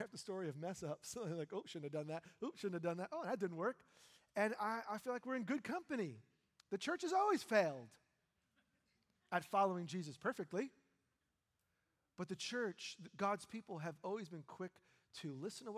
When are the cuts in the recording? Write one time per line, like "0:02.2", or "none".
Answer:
none